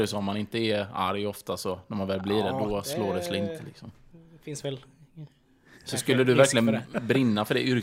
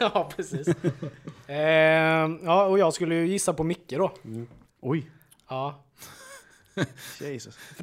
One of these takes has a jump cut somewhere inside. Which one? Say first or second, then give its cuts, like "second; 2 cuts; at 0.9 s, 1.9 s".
second; 1 cut; at 4.6 s